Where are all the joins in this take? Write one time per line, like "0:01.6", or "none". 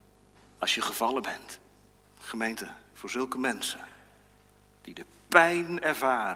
0:02.0